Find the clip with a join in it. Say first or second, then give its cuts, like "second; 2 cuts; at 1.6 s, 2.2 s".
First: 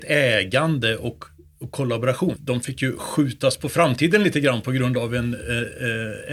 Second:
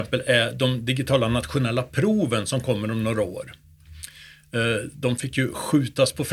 first; 1 cut; at 2.4 s